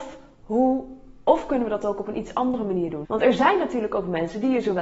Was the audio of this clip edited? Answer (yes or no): yes